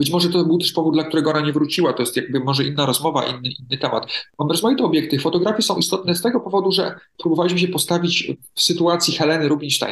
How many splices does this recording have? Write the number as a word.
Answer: zero